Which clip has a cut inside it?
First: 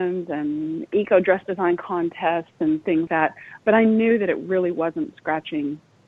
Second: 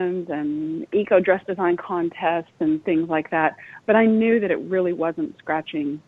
first; 1 cut; at 3.1 s

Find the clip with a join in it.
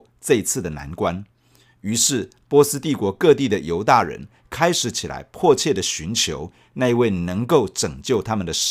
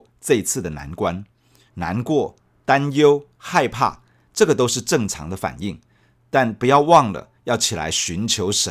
second; 1 cut; at 1.7 s

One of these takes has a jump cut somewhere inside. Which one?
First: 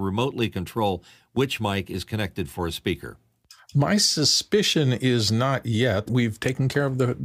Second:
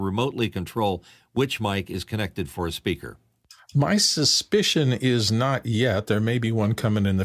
first; 1 cut; at 6.1 s

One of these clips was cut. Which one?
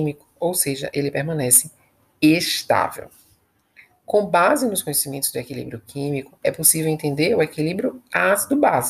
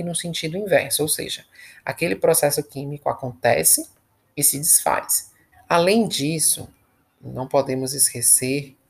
second; 1 cut; at 5.5 s

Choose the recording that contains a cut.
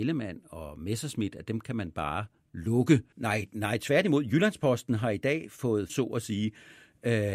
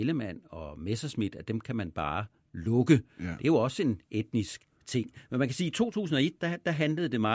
first; 2 cuts; at 3.1 s, 5.9 s

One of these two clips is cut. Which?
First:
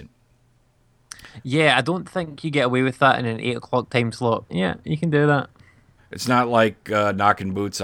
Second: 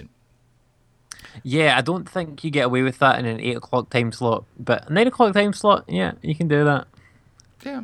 first; 2 cuts; at 4.5 s, 6.0 s

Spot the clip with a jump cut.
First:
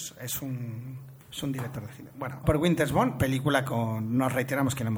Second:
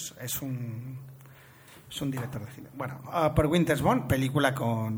first; 2 cuts; at 1.2 s, 2.4 s

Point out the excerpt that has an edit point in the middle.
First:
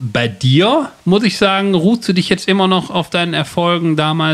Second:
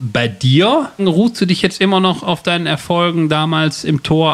second; 1 cut; at 1.0 s

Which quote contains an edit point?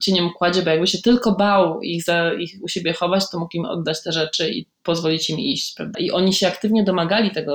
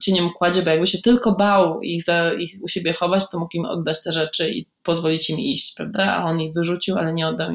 first; 1 cut; at 5.9 s

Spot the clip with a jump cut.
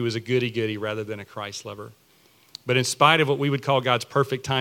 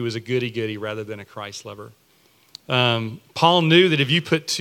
second; 1 cut; at 2.6 s

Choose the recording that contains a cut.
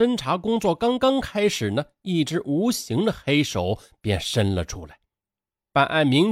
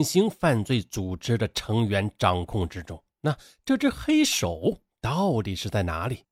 second; 1 cut; at 3.1 s

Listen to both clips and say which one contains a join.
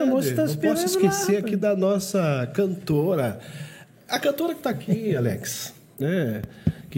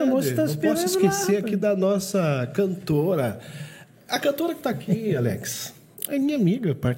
first; 1 cut; at 6.0 s

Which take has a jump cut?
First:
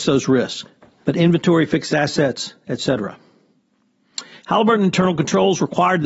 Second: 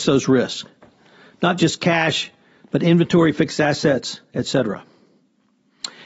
first; 2 cuts; at 1.0 s, 4.4 s

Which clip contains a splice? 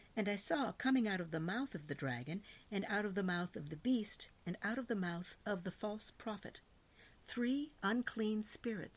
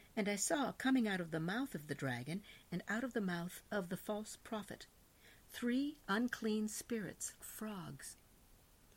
second; 2 cuts; at 2.6 s, 7.4 s

